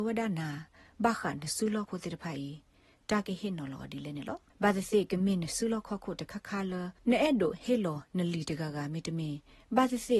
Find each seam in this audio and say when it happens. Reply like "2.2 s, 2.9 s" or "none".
1.9 s, 4.5 s, 7.0 s